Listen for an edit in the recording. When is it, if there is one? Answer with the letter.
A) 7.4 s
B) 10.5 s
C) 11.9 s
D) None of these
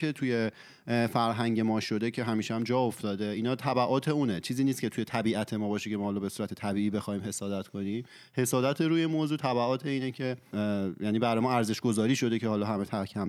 B